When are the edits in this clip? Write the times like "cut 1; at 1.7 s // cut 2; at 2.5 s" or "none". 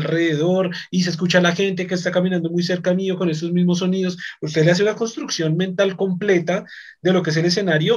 none